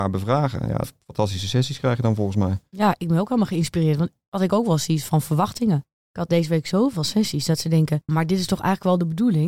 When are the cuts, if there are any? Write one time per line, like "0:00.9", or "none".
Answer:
0:08.1